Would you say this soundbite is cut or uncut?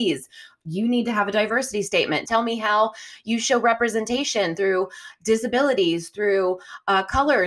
cut